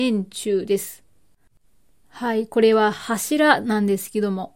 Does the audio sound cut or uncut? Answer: uncut